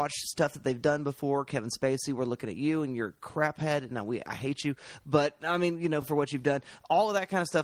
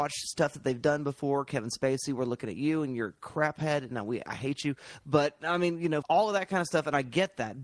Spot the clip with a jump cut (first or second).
second